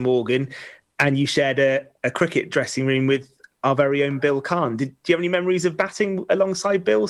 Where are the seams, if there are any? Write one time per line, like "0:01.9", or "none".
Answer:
none